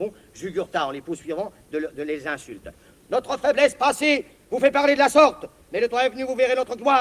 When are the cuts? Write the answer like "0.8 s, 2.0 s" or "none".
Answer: none